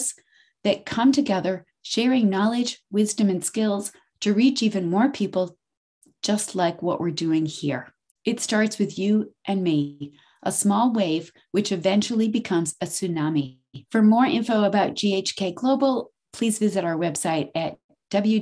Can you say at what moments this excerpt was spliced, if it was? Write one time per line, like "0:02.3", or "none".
0:08.1
0:13.8